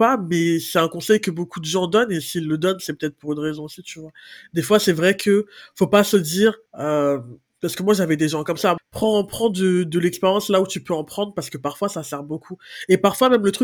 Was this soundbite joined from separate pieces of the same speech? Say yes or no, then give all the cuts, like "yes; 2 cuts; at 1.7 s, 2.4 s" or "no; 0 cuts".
yes; 2 cuts; at 6.7 s, 8.8 s